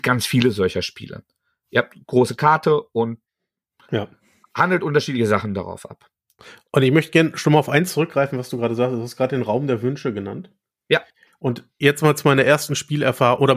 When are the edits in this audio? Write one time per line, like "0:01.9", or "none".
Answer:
none